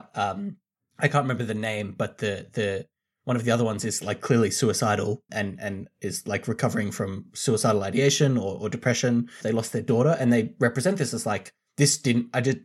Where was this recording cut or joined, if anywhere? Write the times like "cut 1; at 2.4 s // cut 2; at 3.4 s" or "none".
cut 1; at 5.3 s // cut 2; at 9.4 s